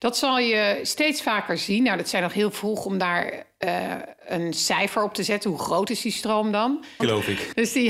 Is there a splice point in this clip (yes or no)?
yes